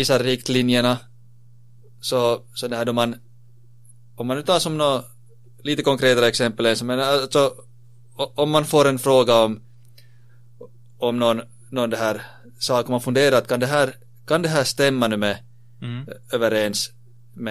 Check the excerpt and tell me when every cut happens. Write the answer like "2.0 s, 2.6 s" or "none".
none

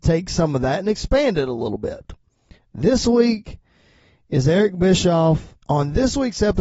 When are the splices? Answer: 5.6 s

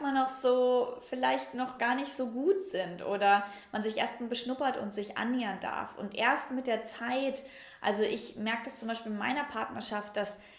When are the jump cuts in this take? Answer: none

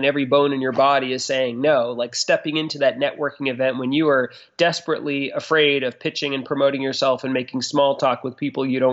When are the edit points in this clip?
none

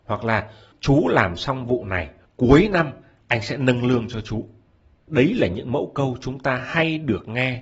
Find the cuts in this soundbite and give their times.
none

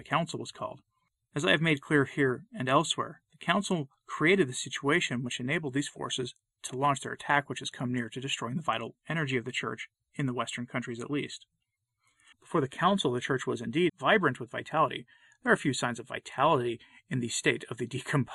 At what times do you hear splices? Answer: 12.3 s, 13.9 s

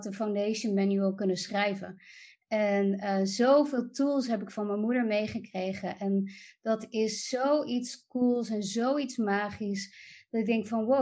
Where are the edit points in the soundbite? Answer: none

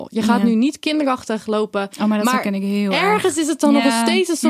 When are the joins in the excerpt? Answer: 1.9 s

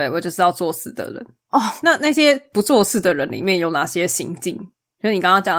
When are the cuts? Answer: none

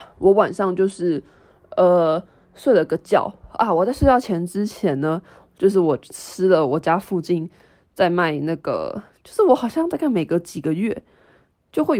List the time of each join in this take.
9.1 s

